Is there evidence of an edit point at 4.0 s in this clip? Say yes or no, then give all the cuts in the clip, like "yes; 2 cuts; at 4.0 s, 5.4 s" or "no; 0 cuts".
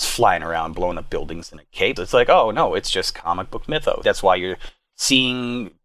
yes; 2 cuts; at 2.0 s, 4.0 s